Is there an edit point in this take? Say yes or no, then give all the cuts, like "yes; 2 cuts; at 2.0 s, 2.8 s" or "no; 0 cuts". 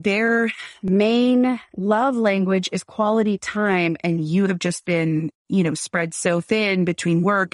no; 0 cuts